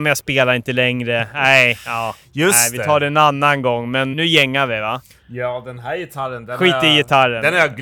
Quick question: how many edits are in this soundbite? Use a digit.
1